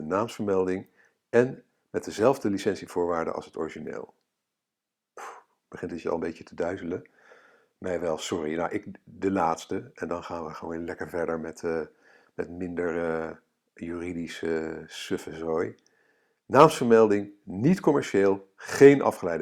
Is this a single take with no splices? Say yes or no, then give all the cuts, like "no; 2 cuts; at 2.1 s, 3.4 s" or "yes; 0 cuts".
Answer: yes; 0 cuts